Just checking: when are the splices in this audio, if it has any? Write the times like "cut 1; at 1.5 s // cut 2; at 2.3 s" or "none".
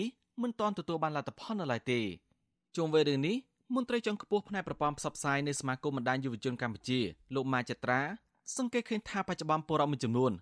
none

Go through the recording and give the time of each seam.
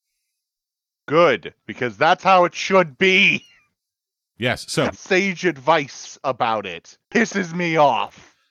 cut 1; at 4.9 s // cut 2; at 7.0 s

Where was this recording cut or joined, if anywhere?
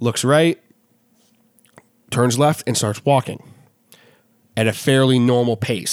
none

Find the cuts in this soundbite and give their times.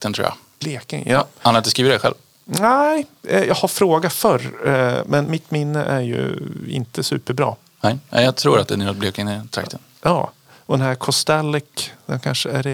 none

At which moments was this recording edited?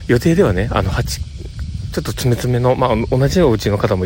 none

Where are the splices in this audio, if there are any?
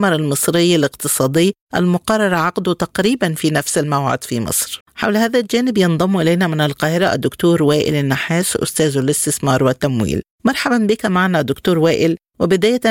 cut 1; at 4.8 s

